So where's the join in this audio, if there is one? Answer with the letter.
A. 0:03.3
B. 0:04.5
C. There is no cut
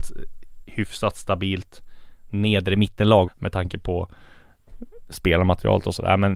A